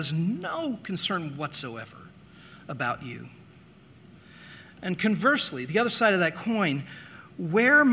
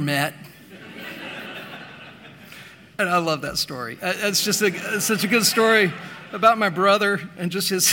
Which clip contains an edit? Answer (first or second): second